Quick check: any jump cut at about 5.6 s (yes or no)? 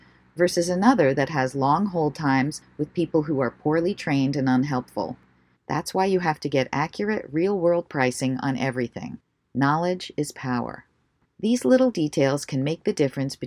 yes